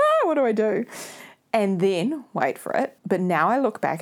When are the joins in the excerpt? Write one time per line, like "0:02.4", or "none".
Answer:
0:03.0